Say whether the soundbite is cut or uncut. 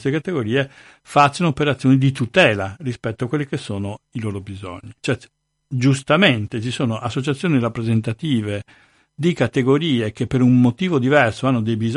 cut